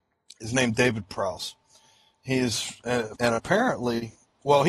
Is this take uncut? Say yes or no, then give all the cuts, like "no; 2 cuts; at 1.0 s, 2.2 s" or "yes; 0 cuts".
no; 1 cut; at 3.2 s